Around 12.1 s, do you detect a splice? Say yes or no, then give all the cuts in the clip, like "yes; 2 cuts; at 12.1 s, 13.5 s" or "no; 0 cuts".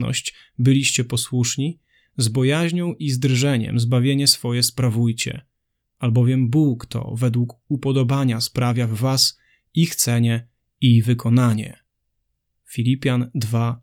no; 0 cuts